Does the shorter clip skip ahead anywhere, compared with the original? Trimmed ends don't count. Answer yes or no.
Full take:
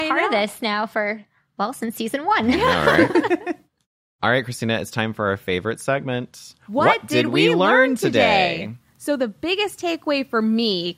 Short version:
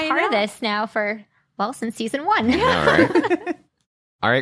no